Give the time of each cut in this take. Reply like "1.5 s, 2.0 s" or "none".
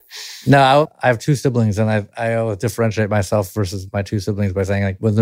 none